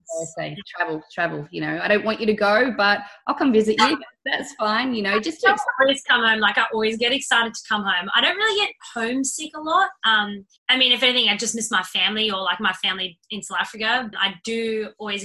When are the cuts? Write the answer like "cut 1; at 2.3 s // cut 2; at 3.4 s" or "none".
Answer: cut 1; at 10.6 s // cut 2; at 14.1 s